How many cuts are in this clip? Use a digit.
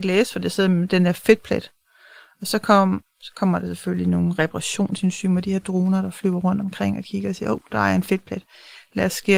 0